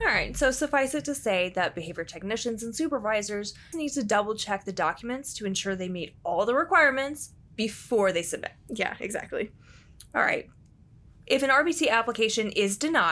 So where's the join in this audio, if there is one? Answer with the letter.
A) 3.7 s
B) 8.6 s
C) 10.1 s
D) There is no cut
A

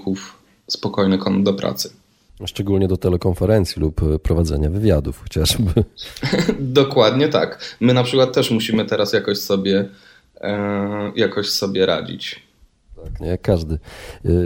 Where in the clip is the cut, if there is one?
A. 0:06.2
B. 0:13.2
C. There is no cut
B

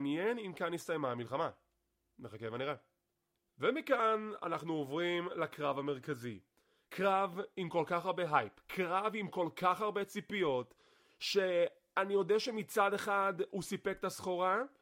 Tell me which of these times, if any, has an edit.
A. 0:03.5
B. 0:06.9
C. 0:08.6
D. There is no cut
D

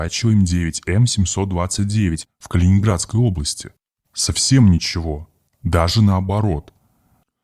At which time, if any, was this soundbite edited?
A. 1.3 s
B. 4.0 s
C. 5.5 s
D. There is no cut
B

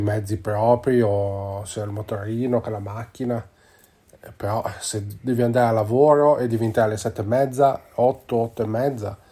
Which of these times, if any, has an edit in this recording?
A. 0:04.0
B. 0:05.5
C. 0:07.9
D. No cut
D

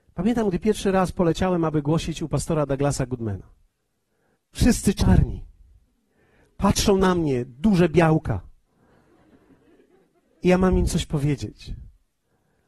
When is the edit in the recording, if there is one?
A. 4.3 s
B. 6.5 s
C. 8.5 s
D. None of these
A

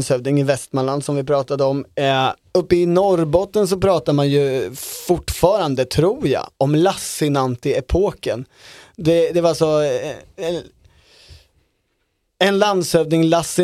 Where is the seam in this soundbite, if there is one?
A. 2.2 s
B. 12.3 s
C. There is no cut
C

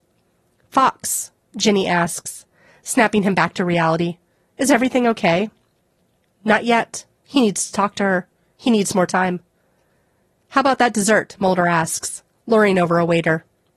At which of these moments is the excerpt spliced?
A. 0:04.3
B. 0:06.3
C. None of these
B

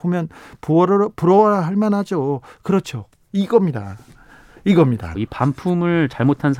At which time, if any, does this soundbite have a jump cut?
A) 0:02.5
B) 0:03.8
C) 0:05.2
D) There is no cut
C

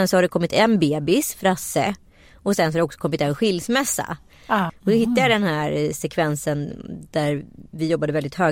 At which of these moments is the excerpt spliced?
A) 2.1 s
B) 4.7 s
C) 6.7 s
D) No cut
B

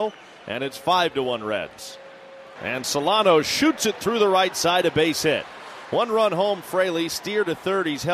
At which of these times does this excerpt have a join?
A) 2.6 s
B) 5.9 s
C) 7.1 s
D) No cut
A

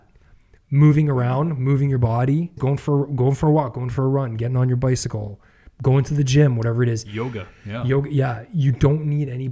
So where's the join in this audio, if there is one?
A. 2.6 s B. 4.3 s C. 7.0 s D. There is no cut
A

